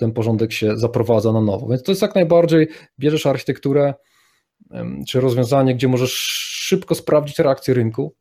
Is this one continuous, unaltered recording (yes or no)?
yes